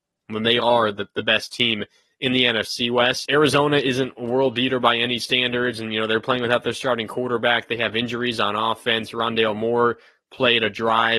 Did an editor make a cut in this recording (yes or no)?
yes